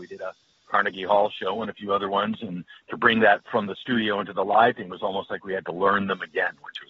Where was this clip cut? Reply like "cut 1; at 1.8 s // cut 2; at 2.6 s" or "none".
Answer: none